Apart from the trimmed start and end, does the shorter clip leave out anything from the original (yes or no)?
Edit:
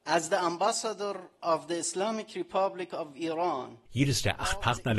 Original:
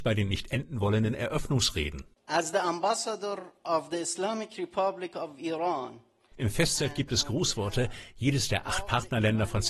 yes